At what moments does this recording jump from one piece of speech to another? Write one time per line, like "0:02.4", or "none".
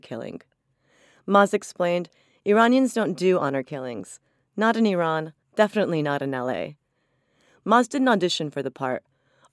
0:05.4